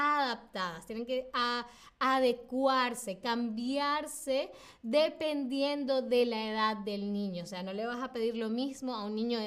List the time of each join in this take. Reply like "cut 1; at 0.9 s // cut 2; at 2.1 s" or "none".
none

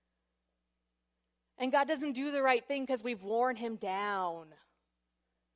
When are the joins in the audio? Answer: none

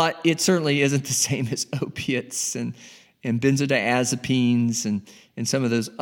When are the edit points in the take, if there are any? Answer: none

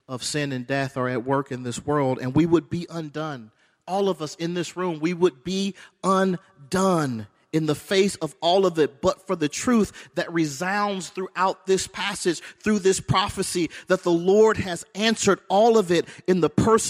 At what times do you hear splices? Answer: none

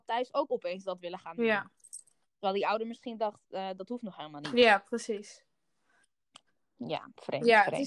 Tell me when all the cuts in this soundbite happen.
none

